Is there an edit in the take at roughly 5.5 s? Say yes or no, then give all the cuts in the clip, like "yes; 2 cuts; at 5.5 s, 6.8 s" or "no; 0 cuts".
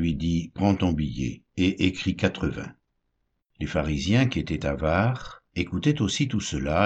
yes; 2 cuts; at 3.4 s, 5.5 s